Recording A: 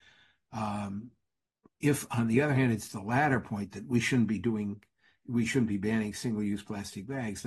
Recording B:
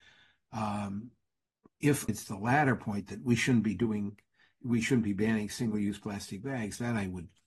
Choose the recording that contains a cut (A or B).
B